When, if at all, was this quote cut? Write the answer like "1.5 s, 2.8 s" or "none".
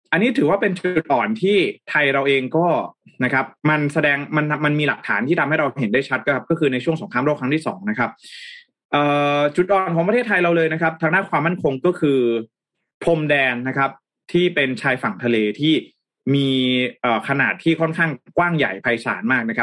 3.6 s